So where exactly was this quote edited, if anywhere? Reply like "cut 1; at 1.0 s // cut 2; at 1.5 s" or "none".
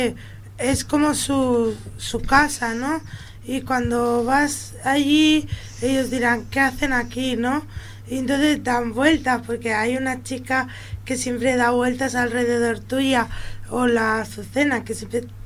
none